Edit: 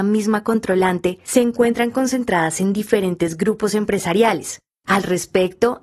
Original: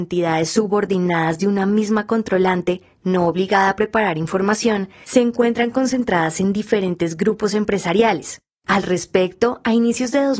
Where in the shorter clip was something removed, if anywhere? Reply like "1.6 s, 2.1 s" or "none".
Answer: 1.2 s